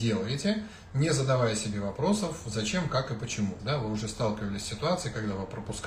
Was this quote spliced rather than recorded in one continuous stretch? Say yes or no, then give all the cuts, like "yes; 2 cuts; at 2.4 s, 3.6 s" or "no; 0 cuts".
yes; 1 cut; at 3.6 s